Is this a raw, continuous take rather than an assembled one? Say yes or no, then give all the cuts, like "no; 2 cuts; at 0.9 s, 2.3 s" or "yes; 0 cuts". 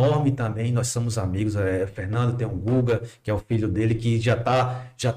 yes; 0 cuts